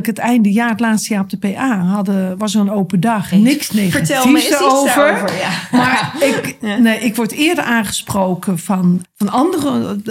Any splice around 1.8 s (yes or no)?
no